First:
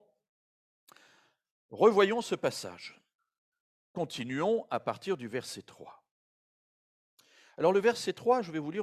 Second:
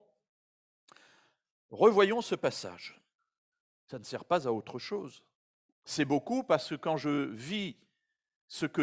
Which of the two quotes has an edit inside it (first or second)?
second